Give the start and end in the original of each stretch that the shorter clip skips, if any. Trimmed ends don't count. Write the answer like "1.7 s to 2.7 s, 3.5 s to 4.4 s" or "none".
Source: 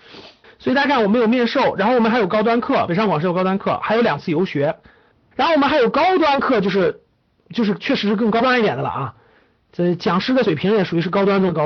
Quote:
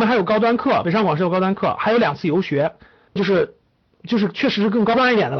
5.2 s to 6.6 s